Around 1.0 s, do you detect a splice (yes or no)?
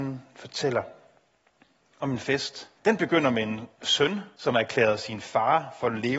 no